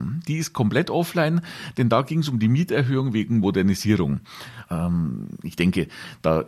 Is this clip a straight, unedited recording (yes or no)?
no